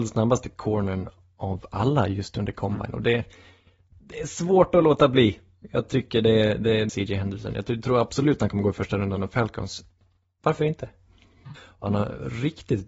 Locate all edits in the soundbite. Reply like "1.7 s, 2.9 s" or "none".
6.9 s, 11.5 s